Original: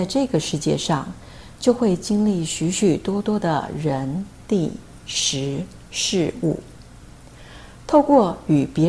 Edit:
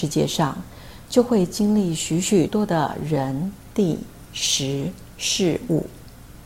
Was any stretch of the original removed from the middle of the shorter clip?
yes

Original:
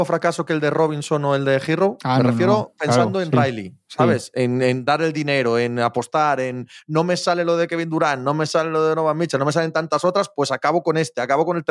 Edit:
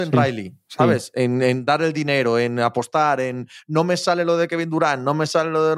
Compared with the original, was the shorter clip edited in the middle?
no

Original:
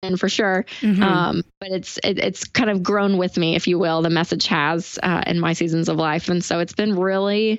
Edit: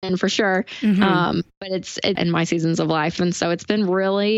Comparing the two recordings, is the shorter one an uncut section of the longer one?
no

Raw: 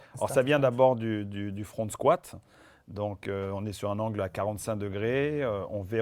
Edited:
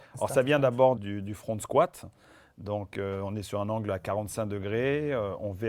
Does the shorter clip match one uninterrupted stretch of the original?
no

